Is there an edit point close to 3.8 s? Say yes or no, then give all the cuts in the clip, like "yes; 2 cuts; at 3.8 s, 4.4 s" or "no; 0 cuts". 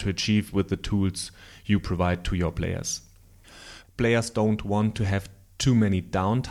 yes; 1 cut; at 3.8 s